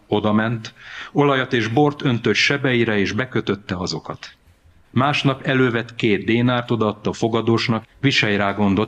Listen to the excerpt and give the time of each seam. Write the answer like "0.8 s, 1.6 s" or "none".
4.8 s, 7.8 s